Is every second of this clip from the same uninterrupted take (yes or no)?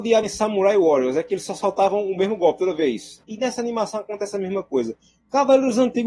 no